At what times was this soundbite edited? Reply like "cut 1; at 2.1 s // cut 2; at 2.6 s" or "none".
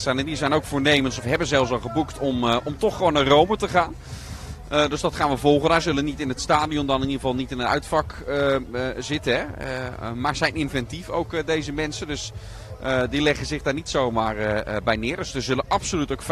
none